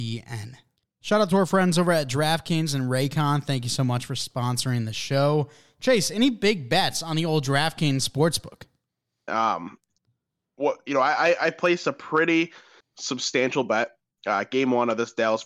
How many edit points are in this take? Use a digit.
1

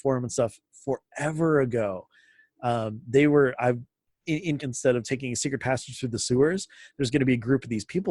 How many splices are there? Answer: 1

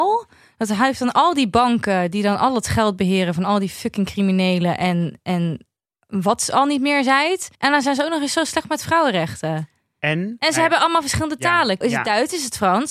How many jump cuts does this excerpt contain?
2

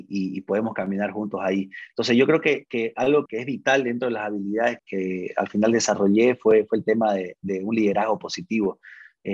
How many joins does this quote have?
2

